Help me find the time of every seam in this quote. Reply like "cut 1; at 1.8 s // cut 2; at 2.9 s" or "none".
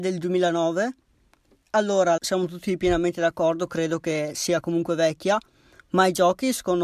cut 1; at 2.2 s